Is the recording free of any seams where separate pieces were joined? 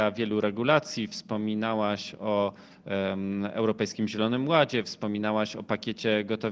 yes; 0 cuts

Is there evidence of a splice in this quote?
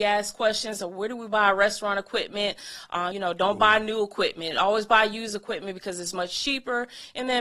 yes; 1 cut; at 3.1 s

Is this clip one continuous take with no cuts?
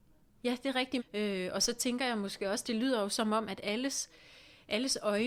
no; 1 cut; at 1.0 s

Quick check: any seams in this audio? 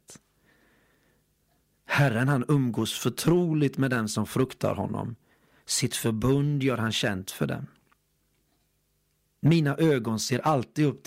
no; 0 cuts

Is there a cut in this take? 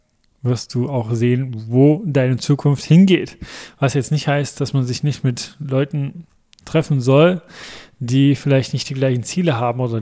no; 0 cuts

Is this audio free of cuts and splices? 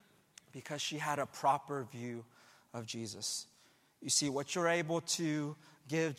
yes; 0 cuts

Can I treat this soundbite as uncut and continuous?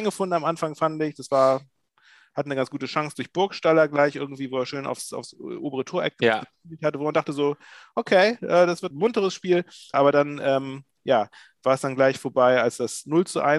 no; 1 cut; at 9.9 s

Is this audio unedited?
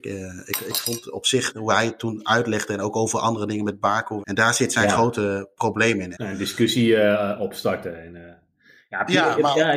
no; 2 cuts; at 4.2 s, 6.1 s

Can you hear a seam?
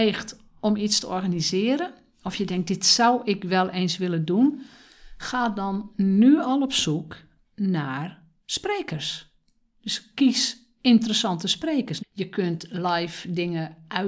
yes; 1 cut; at 12.0 s

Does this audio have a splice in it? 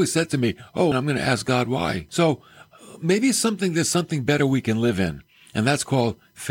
yes; 2 cuts; at 0.9 s, 2.1 s

